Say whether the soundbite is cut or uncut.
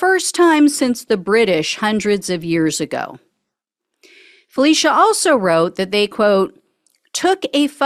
uncut